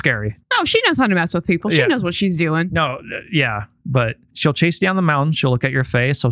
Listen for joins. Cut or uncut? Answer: uncut